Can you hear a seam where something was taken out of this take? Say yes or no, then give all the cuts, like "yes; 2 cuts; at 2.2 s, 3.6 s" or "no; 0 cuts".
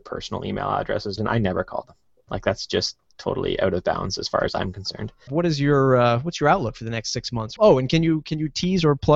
yes; 3 cuts; at 1.2 s, 5.3 s, 7.6 s